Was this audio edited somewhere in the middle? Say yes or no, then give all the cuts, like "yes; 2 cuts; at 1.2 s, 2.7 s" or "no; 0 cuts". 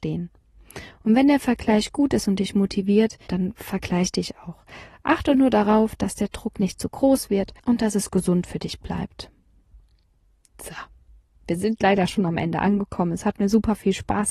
yes; 2 cuts; at 3.3 s, 7.6 s